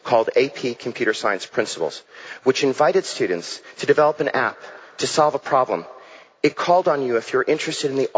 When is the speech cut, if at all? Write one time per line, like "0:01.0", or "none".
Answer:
none